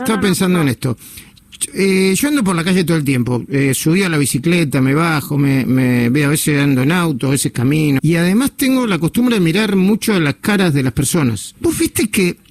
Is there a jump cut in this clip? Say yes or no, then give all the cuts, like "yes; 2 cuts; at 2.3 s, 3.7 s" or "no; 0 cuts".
yes; 2 cuts; at 8.0 s, 11.5 s